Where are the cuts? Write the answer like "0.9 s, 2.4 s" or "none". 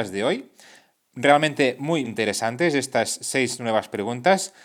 2.0 s

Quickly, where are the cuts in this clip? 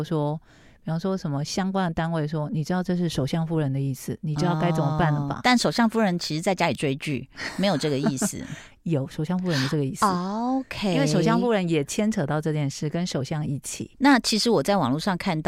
13.9 s

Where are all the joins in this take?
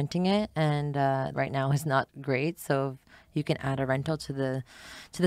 1.3 s

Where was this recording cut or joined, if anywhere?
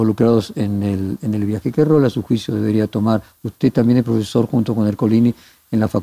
none

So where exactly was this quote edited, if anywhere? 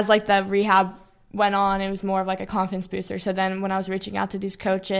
none

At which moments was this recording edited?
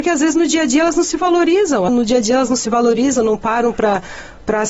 1.9 s

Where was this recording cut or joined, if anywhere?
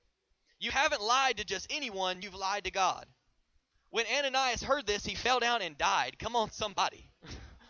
none

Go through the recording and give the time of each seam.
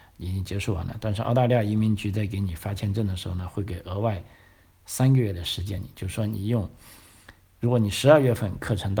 none

